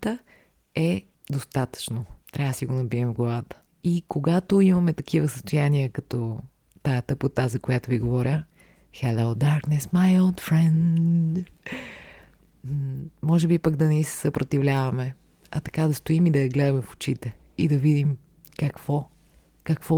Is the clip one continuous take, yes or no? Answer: yes